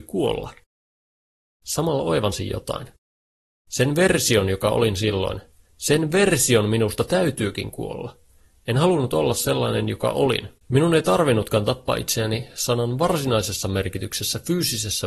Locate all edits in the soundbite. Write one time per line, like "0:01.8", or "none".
0:10.6